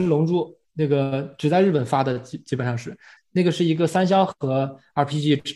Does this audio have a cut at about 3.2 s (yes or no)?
yes